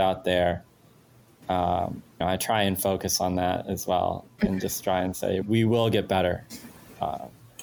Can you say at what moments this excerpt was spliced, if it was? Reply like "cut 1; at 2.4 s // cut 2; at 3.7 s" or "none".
cut 1; at 2.2 s // cut 2; at 5.4 s